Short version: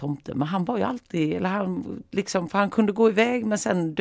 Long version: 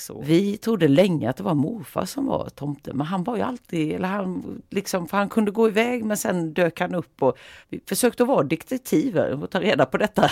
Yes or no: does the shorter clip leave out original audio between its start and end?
no